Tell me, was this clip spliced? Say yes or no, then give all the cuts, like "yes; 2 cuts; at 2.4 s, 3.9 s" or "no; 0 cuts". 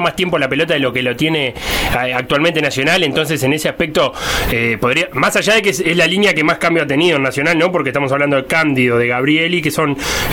no; 0 cuts